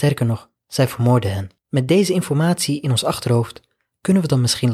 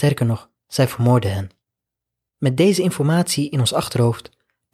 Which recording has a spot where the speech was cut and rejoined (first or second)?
first